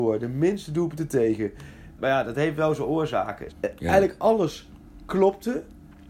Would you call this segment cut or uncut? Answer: cut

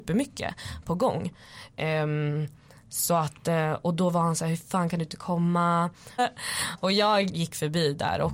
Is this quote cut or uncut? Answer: cut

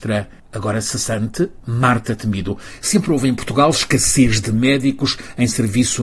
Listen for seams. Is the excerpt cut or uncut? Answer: uncut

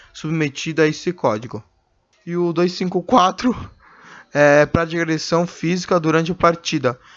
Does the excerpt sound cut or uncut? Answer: uncut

